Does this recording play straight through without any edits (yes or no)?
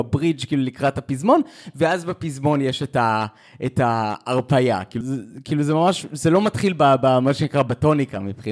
no